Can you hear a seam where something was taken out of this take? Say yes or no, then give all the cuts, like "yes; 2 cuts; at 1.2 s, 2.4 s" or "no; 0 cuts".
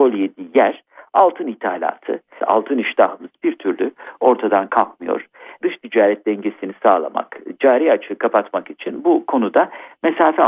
yes; 1 cut; at 2.4 s